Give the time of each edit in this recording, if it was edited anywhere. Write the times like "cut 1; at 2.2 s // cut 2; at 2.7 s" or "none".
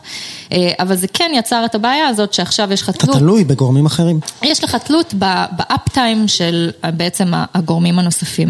none